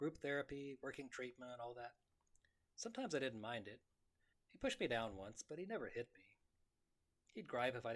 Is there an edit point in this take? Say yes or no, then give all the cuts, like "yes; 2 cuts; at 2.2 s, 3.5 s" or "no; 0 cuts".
yes; 1 cut; at 4.3 s